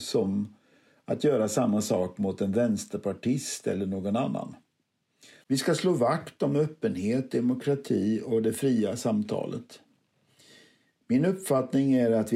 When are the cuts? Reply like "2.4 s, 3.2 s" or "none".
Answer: 5.4 s